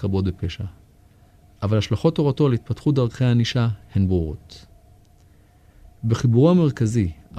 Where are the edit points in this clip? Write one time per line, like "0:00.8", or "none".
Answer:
none